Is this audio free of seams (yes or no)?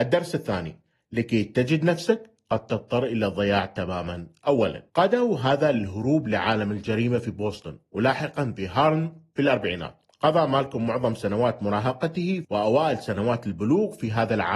yes